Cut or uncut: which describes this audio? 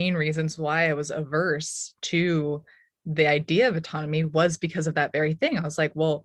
uncut